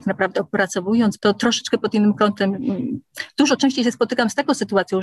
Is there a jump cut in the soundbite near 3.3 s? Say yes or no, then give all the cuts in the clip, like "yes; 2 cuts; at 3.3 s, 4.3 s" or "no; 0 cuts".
no; 1 cut; at 1.2 s